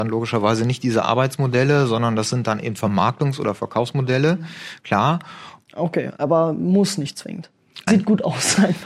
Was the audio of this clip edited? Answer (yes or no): yes